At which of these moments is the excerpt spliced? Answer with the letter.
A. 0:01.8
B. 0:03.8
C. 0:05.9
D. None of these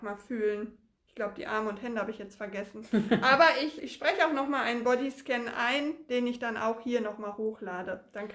B